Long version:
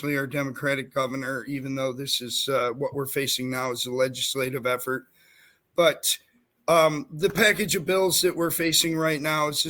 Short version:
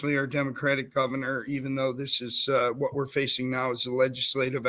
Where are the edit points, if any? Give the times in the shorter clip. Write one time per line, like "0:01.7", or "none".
none